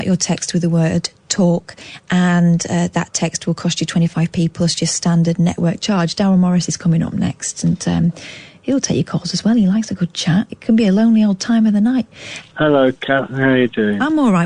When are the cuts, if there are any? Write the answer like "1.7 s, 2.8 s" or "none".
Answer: 10.5 s, 12.4 s